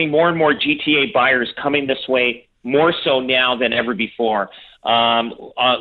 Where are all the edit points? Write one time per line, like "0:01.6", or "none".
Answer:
none